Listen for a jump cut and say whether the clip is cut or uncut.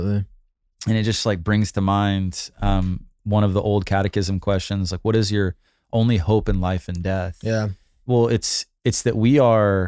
uncut